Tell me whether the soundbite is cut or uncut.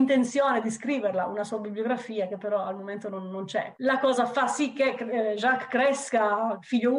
cut